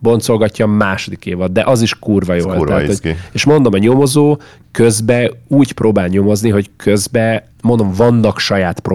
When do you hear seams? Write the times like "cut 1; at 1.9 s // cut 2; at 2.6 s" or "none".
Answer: cut 1; at 7.5 s

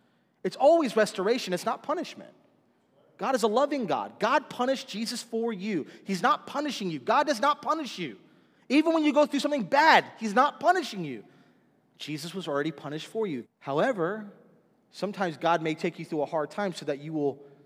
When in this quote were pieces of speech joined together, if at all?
cut 1; at 13.4 s

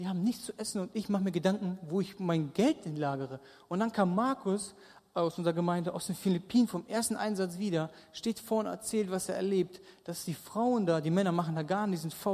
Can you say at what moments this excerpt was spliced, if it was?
none

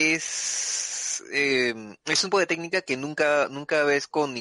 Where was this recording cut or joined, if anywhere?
cut 1; at 2.3 s

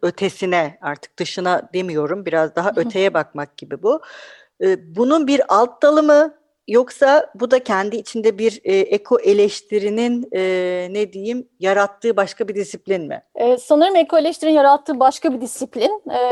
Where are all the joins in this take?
none

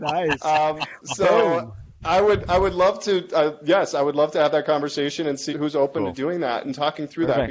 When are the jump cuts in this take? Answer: cut 1; at 5.5 s

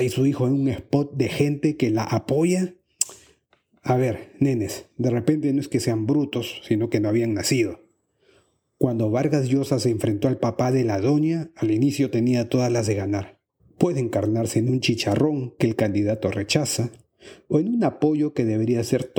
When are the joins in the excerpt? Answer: cut 1; at 13.6 s

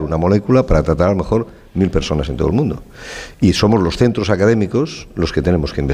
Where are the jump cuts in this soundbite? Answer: none

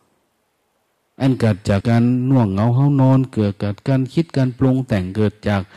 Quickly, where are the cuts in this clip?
cut 1; at 1.8 s

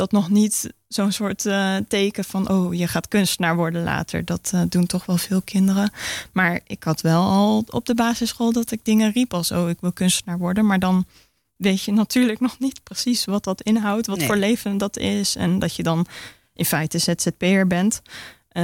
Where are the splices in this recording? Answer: none

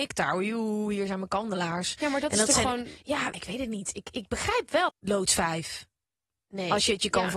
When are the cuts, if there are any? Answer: cut 1; at 3.3 s // cut 2; at 4.9 s

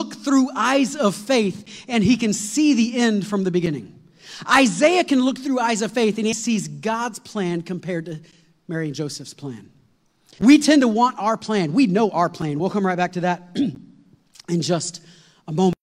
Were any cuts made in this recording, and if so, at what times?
cut 1; at 6.3 s // cut 2; at 10.4 s // cut 3; at 12.6 s

